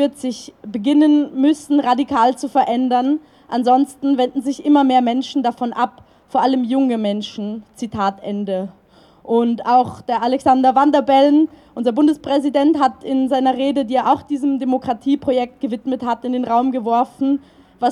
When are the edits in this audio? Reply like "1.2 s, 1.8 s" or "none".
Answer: none